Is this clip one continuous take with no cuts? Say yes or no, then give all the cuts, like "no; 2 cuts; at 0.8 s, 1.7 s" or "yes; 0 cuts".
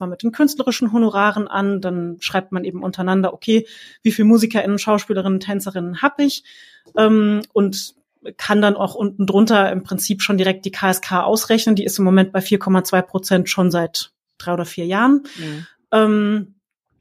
yes; 0 cuts